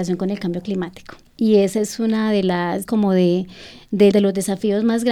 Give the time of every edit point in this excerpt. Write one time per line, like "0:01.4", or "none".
0:01.3
0:02.9
0:04.1